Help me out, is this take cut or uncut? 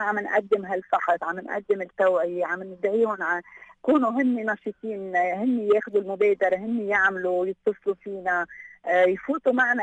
uncut